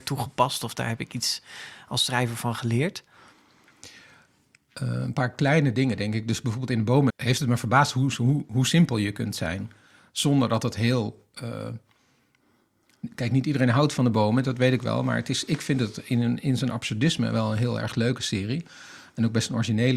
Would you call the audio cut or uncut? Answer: cut